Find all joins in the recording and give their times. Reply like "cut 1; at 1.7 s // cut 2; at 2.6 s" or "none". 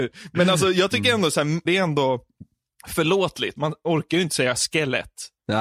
cut 1; at 1.7 s // cut 2; at 3.6 s

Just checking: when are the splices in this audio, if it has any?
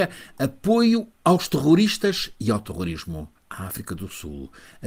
cut 1; at 3.4 s

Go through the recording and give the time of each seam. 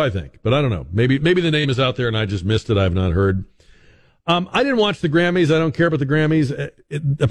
cut 1; at 1.2 s

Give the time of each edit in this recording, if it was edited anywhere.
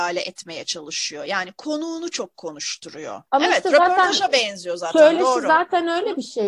cut 1; at 3.3 s

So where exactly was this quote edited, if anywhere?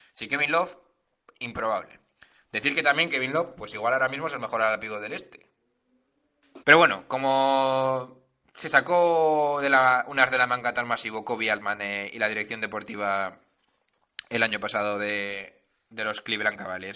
cut 1; at 6.6 s

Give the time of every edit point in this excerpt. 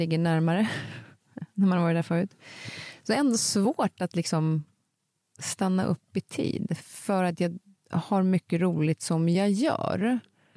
none

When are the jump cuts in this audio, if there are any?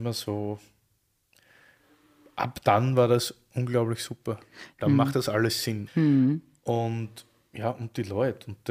cut 1; at 4.8 s // cut 2; at 5.9 s

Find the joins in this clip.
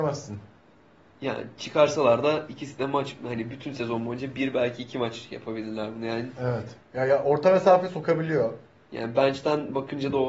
cut 1; at 6.8 s // cut 2; at 8.8 s

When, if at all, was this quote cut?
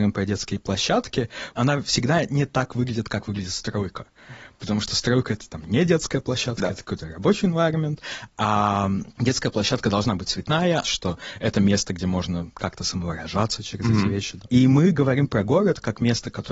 cut 1; at 10.8 s

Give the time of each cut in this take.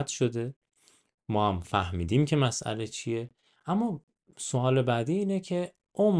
none

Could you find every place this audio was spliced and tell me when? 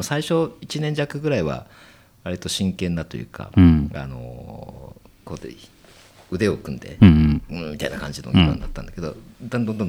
none

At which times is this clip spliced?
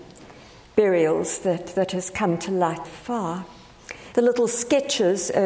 cut 1; at 2.8 s // cut 2; at 4.1 s

